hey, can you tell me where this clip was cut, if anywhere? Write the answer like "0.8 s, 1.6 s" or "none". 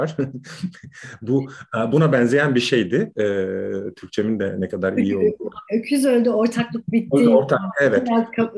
none